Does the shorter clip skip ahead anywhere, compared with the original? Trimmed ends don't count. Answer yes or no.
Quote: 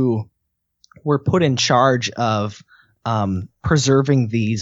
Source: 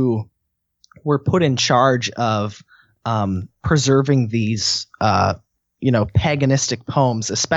no